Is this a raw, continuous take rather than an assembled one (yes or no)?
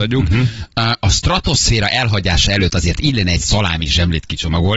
yes